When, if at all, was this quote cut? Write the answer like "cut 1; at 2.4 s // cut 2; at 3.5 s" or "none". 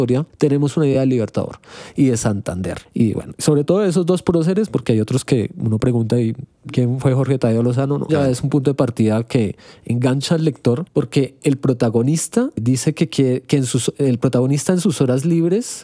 cut 1; at 8.1 s